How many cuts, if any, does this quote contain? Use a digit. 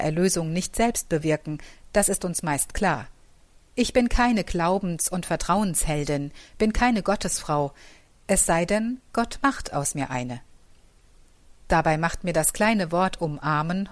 1